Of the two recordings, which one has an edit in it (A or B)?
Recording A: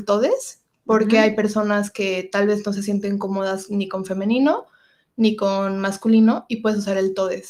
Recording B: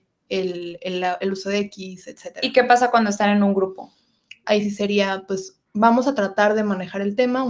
B